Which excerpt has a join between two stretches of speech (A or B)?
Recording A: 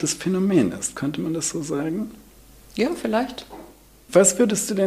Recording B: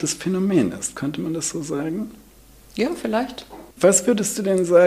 B